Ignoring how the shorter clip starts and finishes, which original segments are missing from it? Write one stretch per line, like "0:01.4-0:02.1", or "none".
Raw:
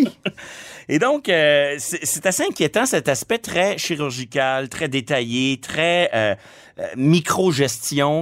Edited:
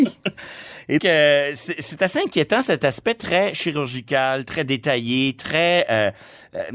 0:01.0-0:01.2